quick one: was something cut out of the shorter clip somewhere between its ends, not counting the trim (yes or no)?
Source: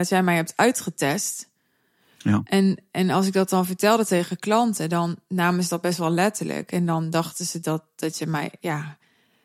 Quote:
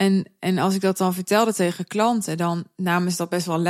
no